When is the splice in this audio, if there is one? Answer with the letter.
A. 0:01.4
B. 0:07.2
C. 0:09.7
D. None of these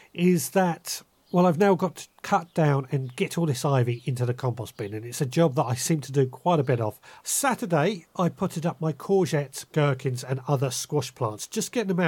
B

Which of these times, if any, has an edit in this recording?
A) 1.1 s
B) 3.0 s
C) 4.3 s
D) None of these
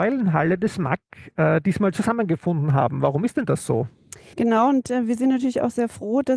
C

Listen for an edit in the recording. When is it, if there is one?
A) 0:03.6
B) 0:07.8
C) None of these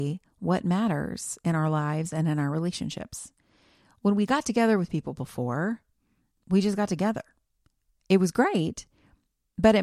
C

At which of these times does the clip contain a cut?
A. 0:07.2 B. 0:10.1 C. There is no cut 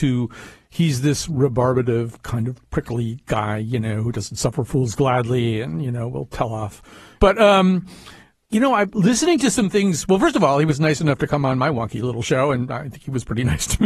A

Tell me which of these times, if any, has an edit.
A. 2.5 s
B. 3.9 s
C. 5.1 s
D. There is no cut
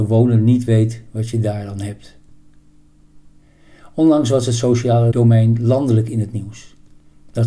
C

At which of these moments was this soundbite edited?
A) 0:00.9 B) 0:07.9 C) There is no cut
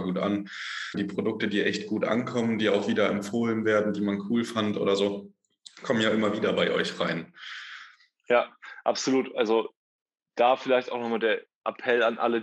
A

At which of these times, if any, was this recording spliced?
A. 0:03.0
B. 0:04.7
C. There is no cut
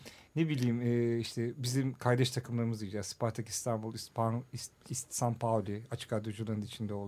B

